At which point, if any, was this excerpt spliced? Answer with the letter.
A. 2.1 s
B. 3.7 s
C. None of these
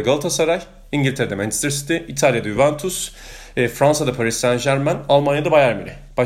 C